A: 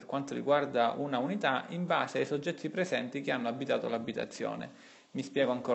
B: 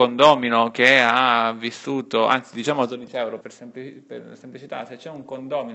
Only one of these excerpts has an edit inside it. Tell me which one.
B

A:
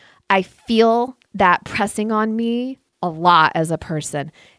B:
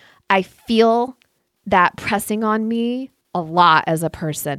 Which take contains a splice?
A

